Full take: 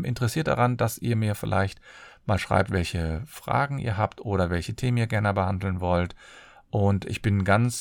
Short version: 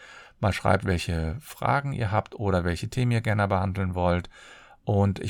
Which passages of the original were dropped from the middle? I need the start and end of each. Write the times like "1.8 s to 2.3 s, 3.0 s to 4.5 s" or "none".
none